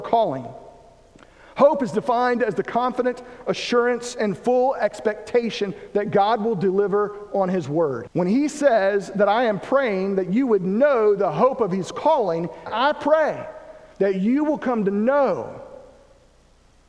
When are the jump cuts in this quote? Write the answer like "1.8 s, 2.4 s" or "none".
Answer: 8.1 s, 12.7 s